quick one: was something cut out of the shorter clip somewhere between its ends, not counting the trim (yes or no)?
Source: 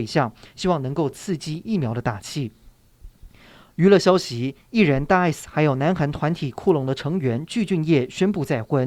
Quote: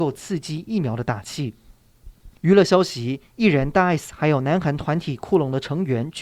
yes